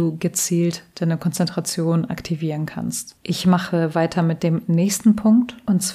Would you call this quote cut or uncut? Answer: cut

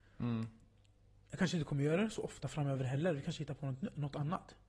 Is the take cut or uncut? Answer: uncut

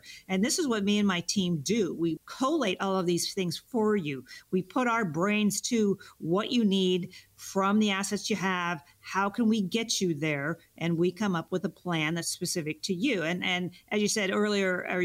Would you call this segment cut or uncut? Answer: cut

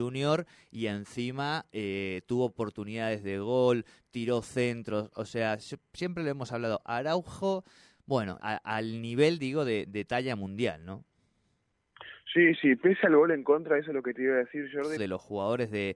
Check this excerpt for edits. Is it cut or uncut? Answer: cut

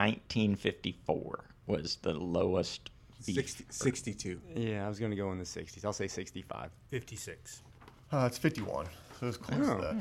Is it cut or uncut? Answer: uncut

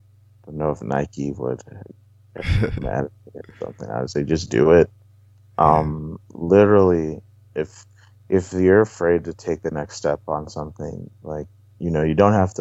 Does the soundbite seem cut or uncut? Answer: uncut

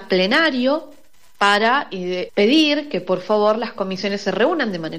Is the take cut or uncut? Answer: cut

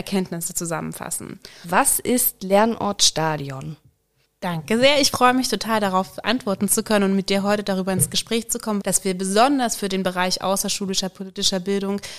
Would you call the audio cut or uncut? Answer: cut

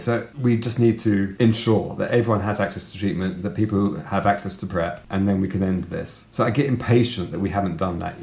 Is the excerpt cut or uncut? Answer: cut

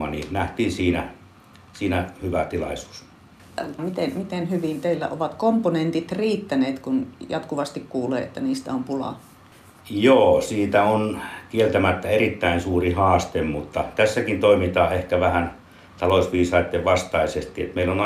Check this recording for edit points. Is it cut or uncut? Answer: cut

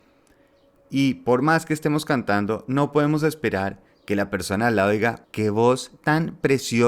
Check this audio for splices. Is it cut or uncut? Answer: cut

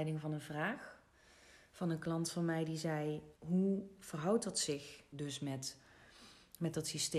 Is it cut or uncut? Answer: cut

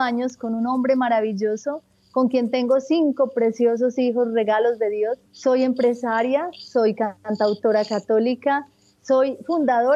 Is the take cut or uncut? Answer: cut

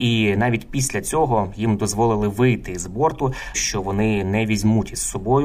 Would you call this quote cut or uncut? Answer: cut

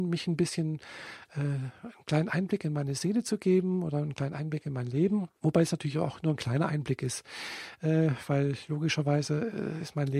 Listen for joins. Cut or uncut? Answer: cut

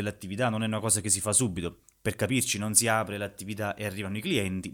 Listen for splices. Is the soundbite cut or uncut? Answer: uncut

